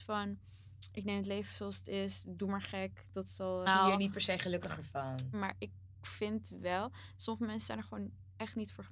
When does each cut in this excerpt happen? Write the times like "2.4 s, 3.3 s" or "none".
3.7 s, 5.3 s